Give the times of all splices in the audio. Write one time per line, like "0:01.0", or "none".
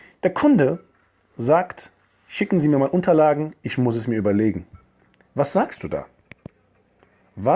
none